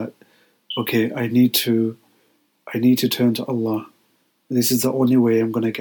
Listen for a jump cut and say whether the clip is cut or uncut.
uncut